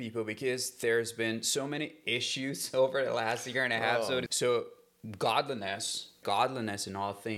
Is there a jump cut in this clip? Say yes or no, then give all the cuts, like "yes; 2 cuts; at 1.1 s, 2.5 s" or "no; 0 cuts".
yes; 2 cuts; at 4.3 s, 6.2 s